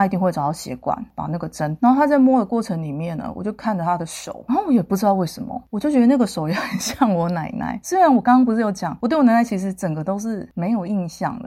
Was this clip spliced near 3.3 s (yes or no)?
no